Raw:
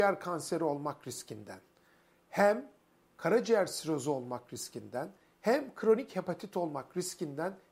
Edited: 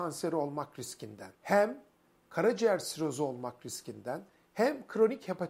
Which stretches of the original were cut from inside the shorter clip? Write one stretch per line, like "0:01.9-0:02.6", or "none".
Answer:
0:01.6-0:02.2